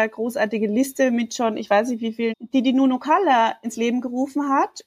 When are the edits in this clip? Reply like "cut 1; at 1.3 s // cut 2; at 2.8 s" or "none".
cut 1; at 2.3 s // cut 2; at 3.6 s